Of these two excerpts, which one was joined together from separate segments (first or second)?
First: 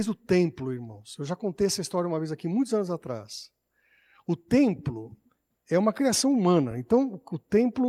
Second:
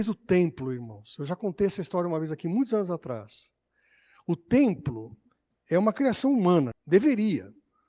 second